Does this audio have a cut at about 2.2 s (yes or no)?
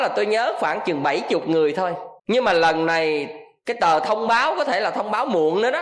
yes